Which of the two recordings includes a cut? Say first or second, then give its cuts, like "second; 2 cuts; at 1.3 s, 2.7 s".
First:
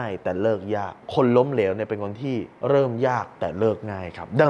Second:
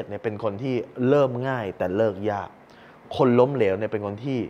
first; 2 cuts; at 1.0 s, 2.6 s